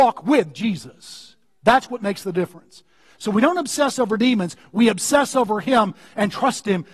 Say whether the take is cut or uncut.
uncut